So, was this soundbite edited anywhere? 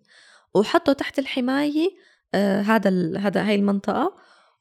no; 0 cuts

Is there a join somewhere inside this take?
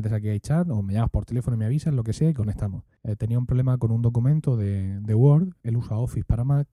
yes; 2 cuts; at 3.0 s, 5.6 s

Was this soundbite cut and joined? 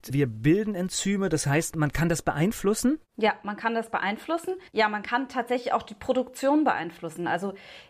yes; 1 cut; at 4.7 s

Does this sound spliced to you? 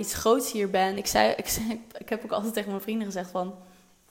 no; 0 cuts

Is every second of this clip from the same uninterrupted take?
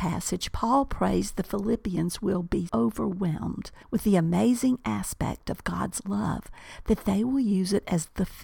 no; 2 cuts; at 2.7 s, 3.8 s

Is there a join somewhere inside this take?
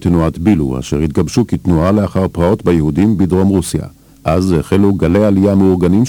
yes; 1 cut; at 4.1 s

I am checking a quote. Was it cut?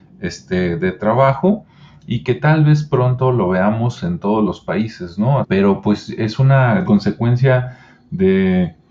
yes; 2 cuts; at 5.4 s, 6.8 s

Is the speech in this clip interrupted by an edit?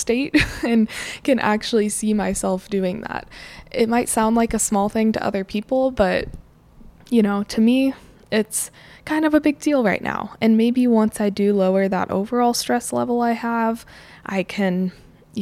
no; 0 cuts

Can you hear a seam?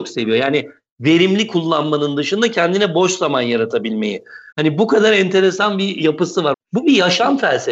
yes; 2 cuts; at 4.5 s, 6.5 s

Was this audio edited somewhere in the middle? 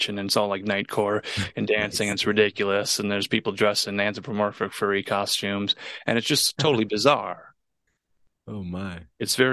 no; 0 cuts

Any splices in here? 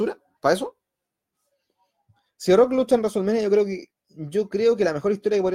no; 0 cuts

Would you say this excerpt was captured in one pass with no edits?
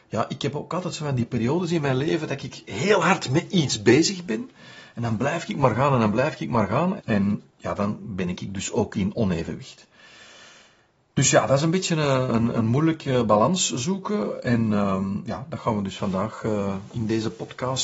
no; 2 cuts; at 7.0 s, 12.5 s

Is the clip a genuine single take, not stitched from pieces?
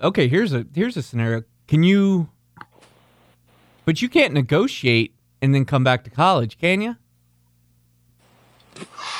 yes; 0 cuts

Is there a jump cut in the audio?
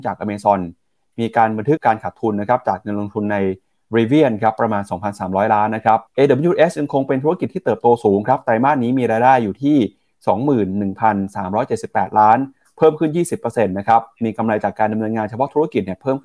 yes; 2 cuts; at 1.8 s, 6.1 s

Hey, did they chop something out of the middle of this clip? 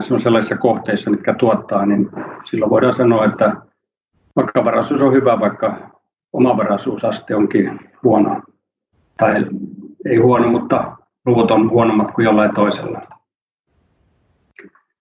no; 0 cuts

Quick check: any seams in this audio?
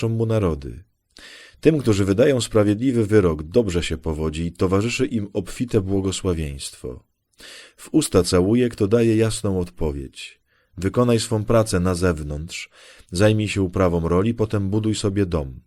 no; 0 cuts

